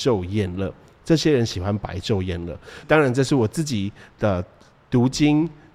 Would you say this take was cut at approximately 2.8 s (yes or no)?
yes